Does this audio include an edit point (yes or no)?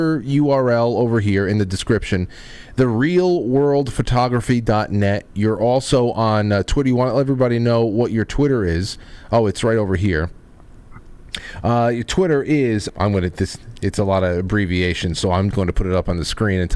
yes